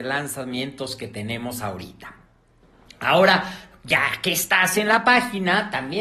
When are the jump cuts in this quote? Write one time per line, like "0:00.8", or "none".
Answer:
none